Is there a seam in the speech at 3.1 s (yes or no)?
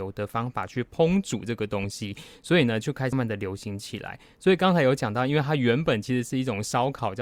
yes